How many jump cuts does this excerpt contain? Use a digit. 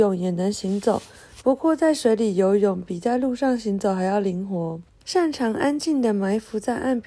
1